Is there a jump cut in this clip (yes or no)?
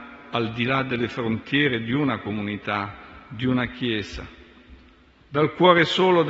no